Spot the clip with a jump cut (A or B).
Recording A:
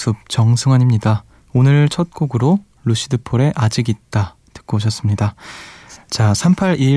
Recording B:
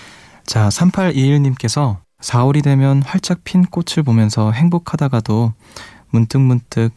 A